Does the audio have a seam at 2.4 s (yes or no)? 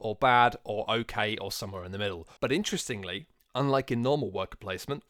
yes